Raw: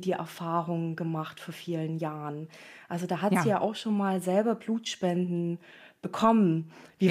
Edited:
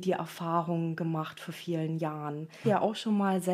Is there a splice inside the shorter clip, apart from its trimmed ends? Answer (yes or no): yes